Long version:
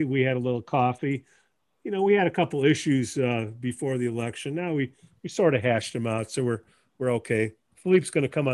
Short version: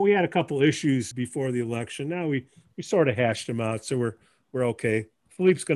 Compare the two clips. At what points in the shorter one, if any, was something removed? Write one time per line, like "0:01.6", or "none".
0:01.1